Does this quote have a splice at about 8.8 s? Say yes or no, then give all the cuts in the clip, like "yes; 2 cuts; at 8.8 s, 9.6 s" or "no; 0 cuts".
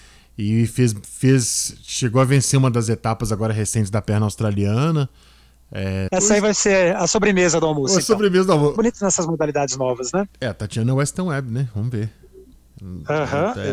yes; 2 cuts; at 6.1 s, 8.8 s